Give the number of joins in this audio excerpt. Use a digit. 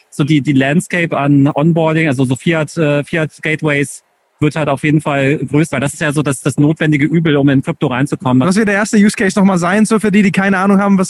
2